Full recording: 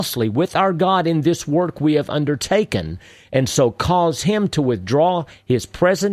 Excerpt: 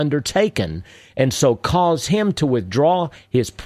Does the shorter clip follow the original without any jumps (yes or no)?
yes